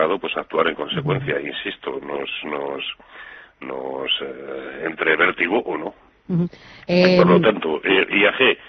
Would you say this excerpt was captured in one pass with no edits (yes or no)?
yes